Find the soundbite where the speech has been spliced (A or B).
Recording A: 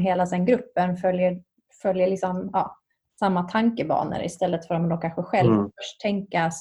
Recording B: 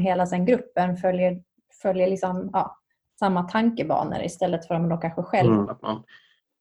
B